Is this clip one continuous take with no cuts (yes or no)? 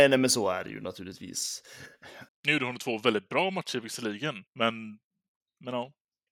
no